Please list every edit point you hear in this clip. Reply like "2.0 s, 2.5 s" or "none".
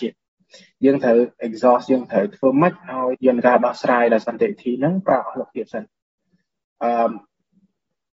3.1 s